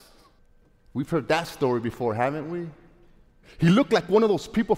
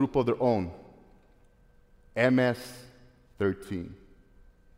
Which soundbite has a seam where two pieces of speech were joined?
first; 1 cut; at 3.4 s

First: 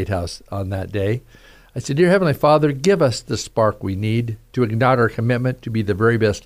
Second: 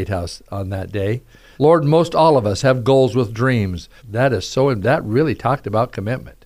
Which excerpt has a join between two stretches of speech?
second; 2 cuts; at 1.6 s, 4.0 s

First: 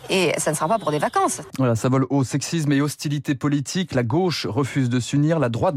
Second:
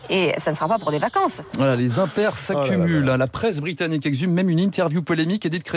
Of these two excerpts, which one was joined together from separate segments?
first; 1 cut; at 1.5 s

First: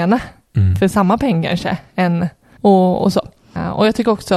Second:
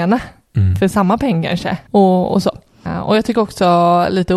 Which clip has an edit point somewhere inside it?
second; 1 cut; at 1.8 s

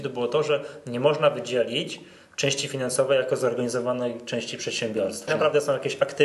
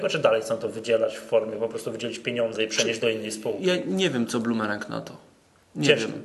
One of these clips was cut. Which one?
first; 1 cut; at 5.3 s

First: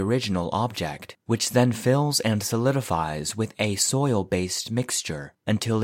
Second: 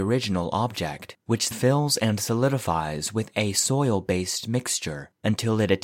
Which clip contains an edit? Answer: second; 1 cut; at 1.5 s

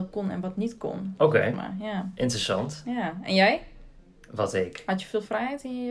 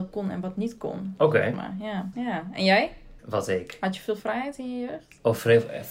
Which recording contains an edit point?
second; 2 cuts; at 2.1 s, 3.2 s

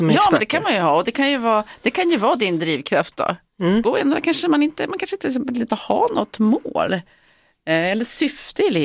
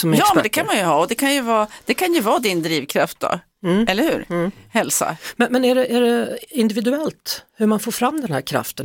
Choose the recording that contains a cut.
first; 1 cut; at 3.8 s

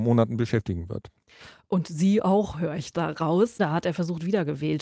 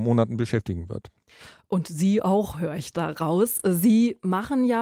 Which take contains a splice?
first; 1 cut; at 3.6 s

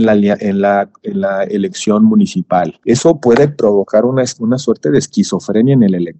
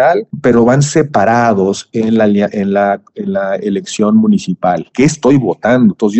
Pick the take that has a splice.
second; 1 cut; at 4.9 s

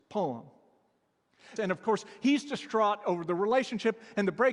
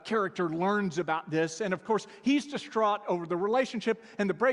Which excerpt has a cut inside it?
first; 1 cut; at 1.6 s

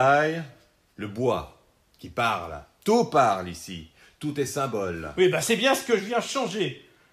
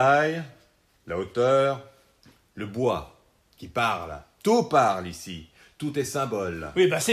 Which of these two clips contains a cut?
first; 1 cut; at 0.9 s

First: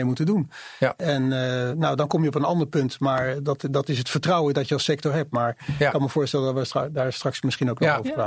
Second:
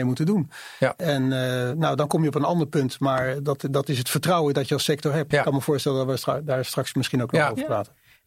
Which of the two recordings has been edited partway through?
second; 1 cut; at 5.3 s

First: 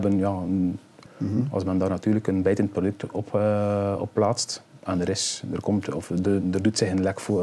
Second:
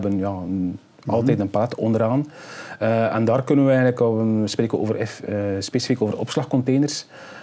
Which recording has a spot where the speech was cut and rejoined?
first; 1 cut; at 1.1 s

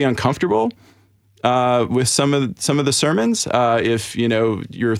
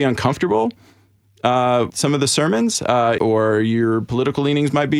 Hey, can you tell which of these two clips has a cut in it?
second; 2 cuts; at 1.9 s, 3.2 s

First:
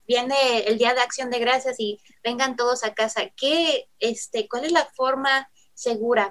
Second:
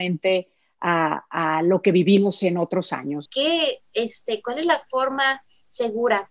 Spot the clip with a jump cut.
second; 1 cut; at 3.3 s

